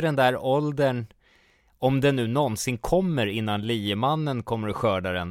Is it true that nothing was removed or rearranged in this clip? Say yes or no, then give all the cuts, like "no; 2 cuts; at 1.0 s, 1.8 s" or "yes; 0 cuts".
yes; 0 cuts